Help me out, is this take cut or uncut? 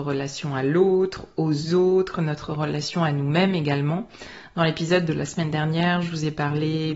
uncut